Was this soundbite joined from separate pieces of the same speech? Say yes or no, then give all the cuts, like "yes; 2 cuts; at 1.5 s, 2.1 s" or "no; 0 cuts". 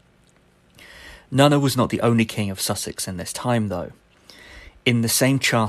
no; 0 cuts